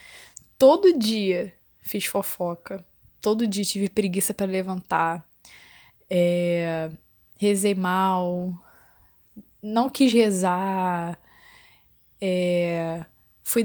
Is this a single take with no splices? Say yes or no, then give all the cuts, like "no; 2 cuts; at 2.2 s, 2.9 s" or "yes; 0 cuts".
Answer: yes; 0 cuts